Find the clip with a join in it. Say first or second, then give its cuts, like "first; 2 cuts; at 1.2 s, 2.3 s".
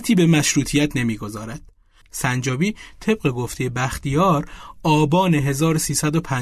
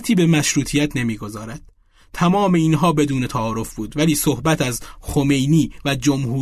first; 1 cut; at 2.0 s